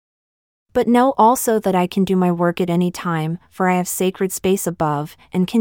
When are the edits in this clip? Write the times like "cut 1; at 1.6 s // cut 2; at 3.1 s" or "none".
none